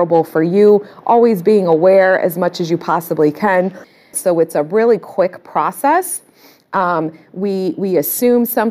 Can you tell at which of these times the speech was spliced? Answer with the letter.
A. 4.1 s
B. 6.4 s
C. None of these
A